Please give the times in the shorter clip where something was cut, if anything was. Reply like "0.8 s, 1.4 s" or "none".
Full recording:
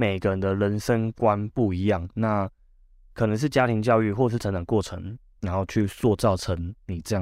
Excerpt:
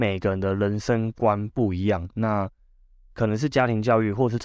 none